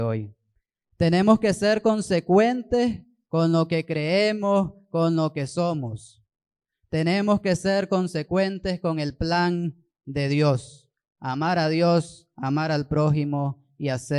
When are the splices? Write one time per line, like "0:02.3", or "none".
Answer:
none